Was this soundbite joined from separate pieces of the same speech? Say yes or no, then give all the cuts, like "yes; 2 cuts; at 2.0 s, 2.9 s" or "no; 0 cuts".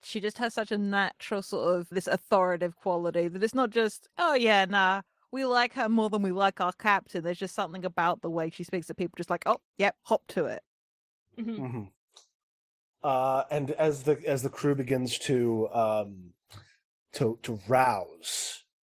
yes; 1 cut; at 1.9 s